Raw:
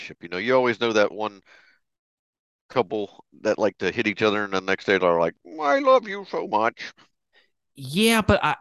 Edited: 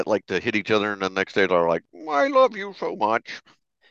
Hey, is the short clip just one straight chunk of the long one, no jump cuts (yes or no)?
yes